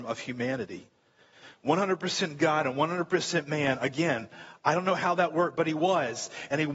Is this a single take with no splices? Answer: yes; 0 cuts

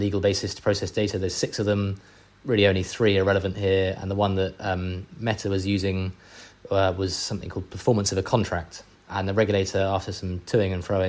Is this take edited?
yes; 1 cut; at 8.9 s

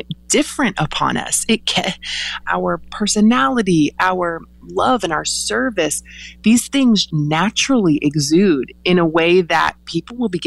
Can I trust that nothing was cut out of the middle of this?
no; 2 cuts; at 2.4 s, 7.1 s

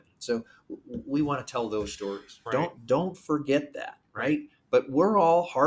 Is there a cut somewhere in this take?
yes; 1 cut; at 2.5 s

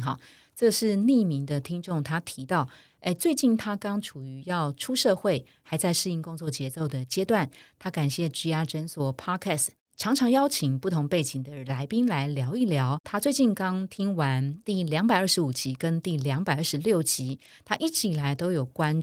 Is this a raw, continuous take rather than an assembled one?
yes; 0 cuts

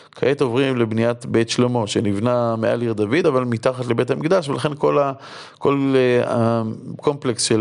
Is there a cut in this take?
no; 0 cuts

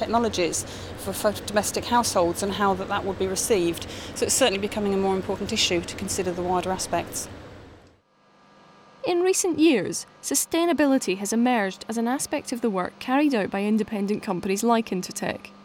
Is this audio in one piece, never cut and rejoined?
yes; 0 cuts

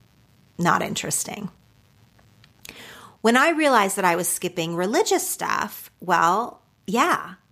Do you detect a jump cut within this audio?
no; 0 cuts

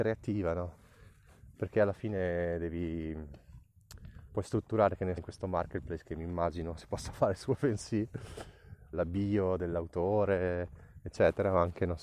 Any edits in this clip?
yes; 2 cuts; at 5.2 s, 8.9 s

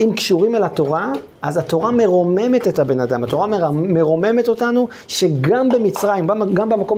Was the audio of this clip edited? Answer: yes; 1 cut; at 1.4 s

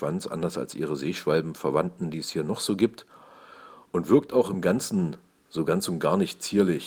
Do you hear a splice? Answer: no; 0 cuts

